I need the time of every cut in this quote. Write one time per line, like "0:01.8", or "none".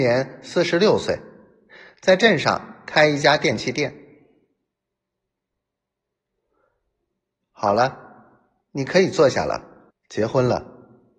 0:09.9